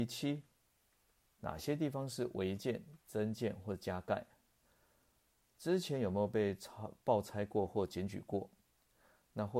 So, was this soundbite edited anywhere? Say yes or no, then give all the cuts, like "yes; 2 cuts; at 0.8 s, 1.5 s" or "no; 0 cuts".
no; 0 cuts